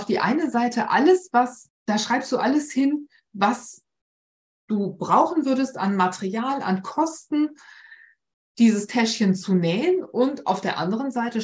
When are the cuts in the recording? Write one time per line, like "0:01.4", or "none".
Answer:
0:08.4